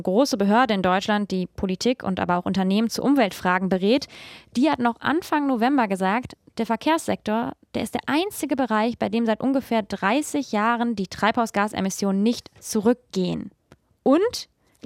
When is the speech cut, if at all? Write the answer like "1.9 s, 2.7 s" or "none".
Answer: none